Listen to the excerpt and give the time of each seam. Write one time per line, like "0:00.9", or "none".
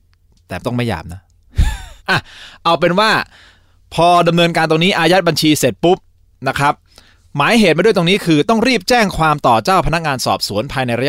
0:02.0

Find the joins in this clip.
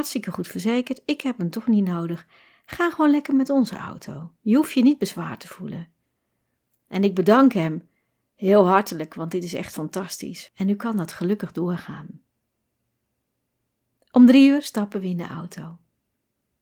0:10.5

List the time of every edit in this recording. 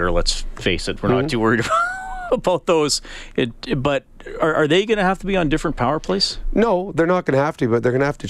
0:02.3

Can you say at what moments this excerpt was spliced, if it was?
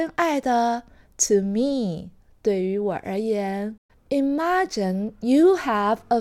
0:03.9

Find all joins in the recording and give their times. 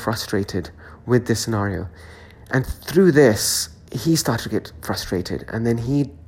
none

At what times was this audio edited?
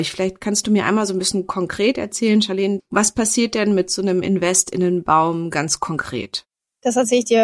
0:02.8

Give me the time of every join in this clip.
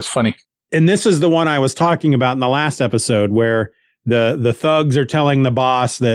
none

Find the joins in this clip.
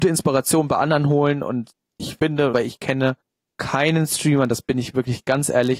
0:02.5

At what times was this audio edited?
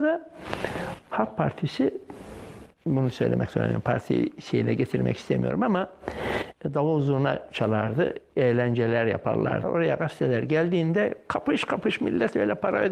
0:09.6

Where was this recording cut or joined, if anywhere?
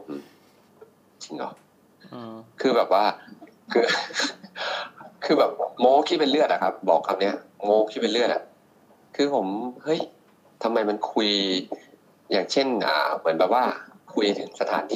none

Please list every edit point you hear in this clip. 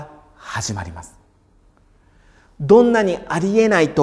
none

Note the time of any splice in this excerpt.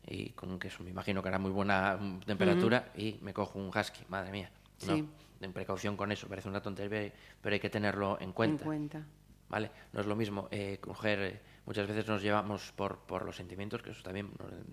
0:09.4

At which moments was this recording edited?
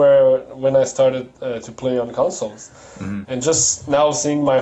0:03.2

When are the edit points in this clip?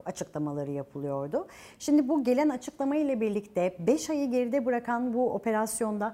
none

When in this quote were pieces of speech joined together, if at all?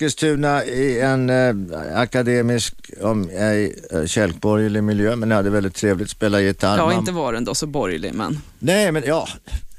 none

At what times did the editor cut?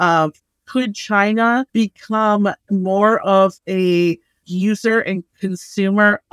0:01.7
0:04.4

